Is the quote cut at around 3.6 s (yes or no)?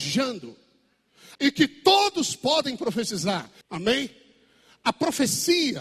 yes